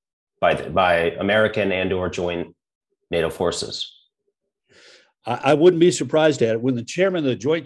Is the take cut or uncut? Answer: uncut